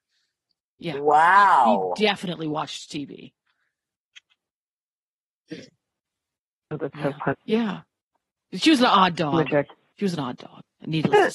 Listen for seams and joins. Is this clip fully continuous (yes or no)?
no